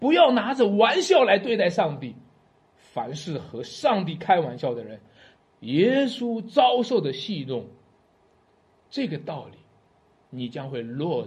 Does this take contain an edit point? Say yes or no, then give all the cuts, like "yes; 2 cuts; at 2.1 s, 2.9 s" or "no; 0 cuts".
yes; 1 cut; at 5.4 s